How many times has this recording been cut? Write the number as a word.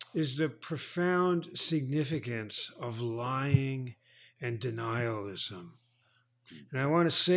zero